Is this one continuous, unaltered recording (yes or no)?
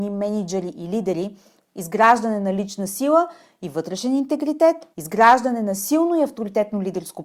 no